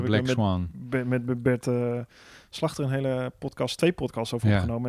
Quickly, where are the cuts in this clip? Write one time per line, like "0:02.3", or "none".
none